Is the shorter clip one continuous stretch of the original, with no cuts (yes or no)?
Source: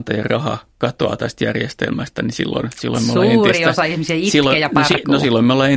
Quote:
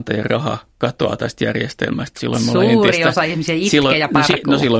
no